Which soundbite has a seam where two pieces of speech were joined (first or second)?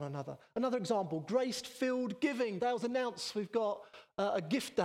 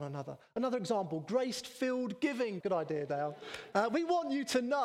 second